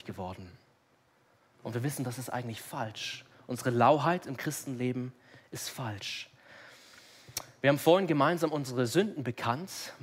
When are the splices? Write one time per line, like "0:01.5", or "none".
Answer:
none